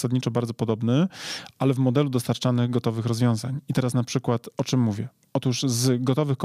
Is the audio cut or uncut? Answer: uncut